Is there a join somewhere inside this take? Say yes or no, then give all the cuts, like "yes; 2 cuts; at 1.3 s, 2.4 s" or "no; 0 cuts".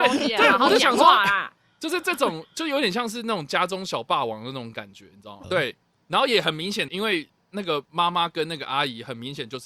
yes; 2 cuts; at 5.4 s, 6.9 s